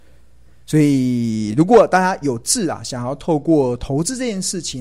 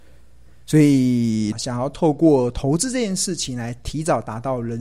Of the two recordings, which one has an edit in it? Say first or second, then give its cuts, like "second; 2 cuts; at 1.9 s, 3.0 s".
second; 1 cut; at 1.5 s